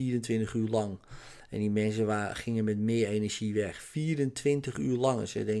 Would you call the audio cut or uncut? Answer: uncut